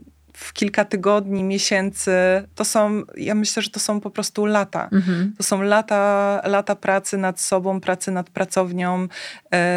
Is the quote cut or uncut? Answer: uncut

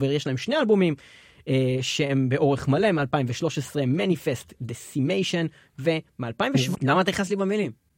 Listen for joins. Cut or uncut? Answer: cut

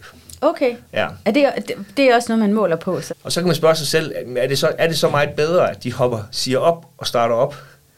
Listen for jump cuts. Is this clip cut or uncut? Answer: cut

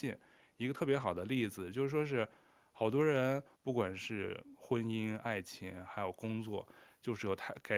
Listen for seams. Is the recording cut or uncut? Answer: cut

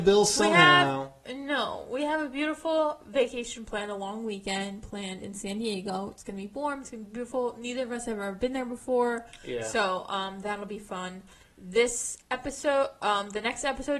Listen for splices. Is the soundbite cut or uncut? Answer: uncut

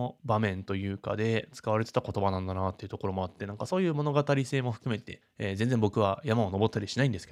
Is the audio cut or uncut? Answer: uncut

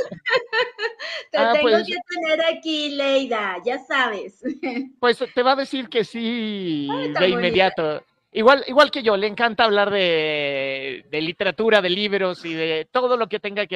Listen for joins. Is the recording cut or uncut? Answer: uncut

